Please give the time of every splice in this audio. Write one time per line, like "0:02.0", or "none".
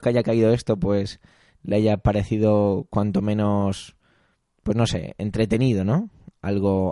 none